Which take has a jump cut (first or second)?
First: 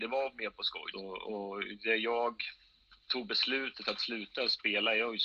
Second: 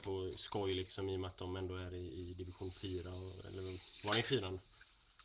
first